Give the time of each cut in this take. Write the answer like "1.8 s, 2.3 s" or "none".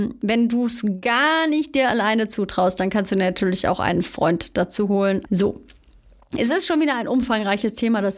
5.3 s